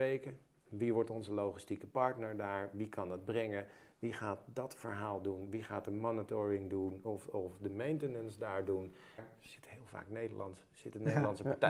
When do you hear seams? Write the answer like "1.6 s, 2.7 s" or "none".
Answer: 9.2 s